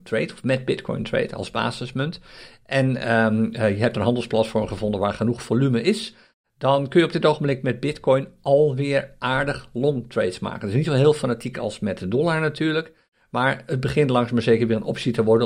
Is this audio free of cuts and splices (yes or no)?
yes